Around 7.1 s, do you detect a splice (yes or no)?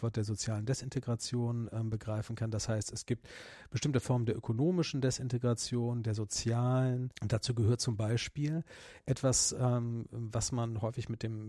yes